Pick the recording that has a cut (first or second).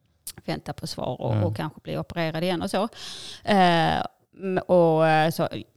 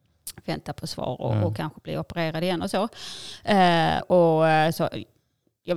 second